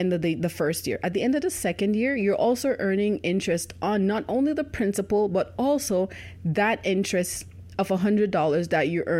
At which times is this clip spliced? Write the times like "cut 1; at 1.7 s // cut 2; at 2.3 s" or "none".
none